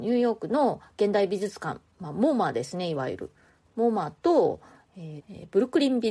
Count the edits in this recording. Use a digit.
1